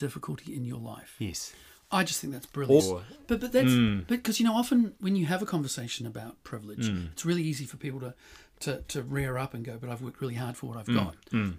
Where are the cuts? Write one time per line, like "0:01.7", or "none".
0:02.8